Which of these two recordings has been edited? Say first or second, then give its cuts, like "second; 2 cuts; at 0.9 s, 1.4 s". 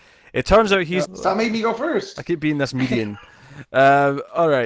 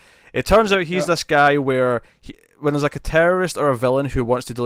first; 1 cut; at 1.1 s